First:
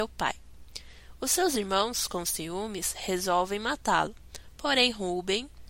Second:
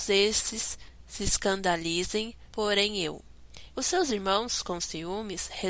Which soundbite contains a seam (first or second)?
second